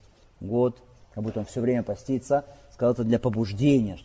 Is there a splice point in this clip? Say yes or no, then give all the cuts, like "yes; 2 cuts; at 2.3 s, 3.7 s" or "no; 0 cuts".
yes; 1 cut; at 1.0 s